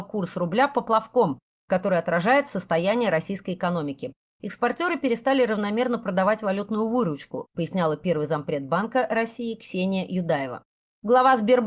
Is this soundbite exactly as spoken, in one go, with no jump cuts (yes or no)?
no